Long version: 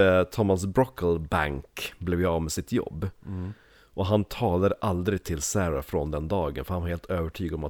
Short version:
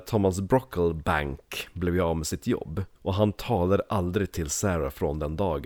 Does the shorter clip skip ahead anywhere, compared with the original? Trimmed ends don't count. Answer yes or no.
yes